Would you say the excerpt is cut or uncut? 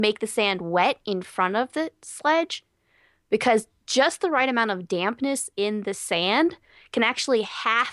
uncut